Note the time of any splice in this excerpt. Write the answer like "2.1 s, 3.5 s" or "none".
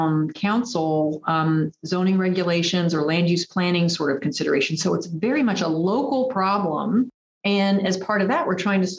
7.2 s